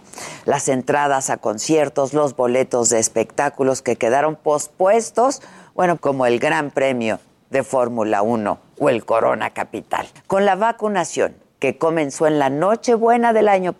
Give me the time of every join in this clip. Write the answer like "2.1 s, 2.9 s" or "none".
6.0 s